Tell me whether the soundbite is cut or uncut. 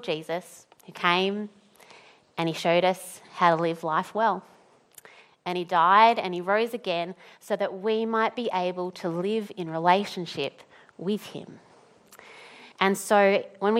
cut